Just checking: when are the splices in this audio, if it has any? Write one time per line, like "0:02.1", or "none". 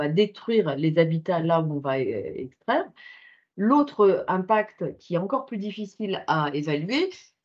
none